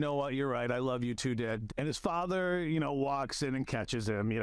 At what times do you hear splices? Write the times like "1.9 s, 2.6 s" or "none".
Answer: 1.7 s